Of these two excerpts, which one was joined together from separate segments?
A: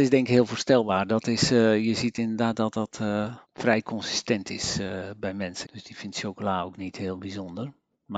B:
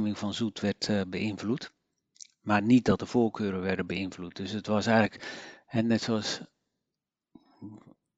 A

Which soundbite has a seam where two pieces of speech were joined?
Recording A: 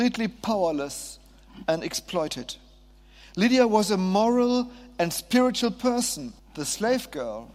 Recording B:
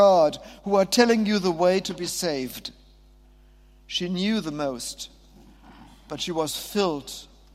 A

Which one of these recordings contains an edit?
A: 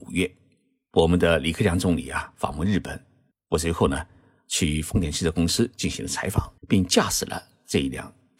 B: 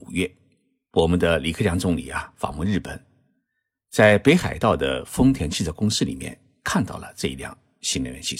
A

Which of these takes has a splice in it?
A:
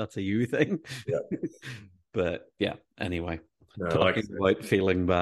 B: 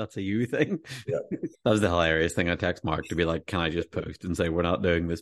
B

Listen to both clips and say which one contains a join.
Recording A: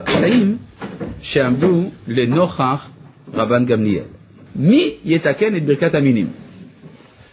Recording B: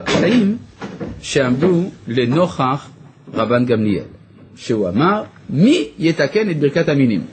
A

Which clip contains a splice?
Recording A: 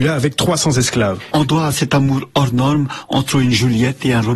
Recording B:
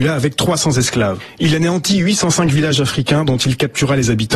A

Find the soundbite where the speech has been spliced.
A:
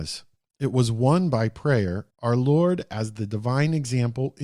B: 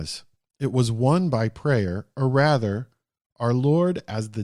A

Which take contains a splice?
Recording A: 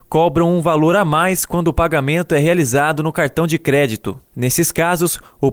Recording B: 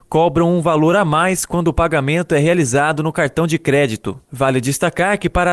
B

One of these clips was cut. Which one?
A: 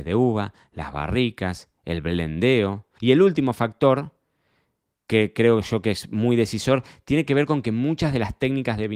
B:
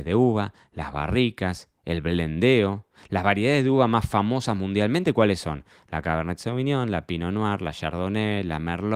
A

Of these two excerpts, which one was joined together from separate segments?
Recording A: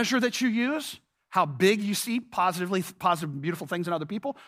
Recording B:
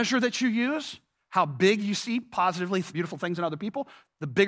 B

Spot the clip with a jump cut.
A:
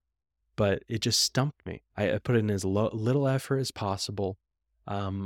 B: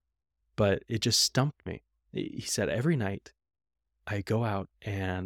A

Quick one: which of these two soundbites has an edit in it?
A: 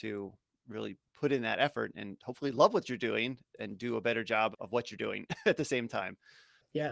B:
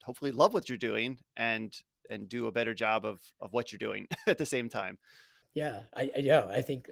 A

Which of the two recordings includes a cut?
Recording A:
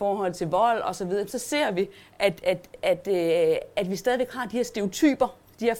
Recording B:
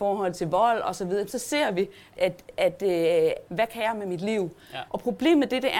B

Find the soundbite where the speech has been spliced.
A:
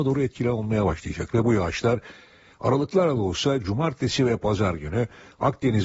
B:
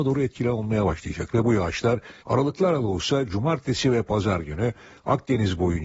B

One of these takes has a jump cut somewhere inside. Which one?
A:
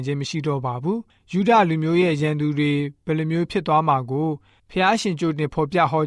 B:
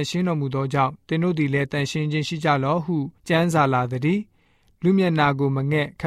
B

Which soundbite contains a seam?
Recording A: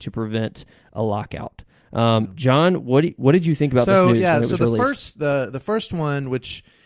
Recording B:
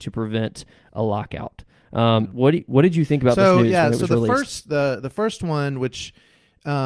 B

